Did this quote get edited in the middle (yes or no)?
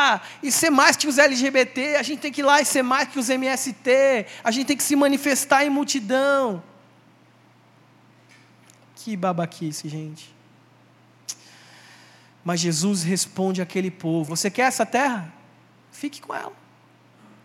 yes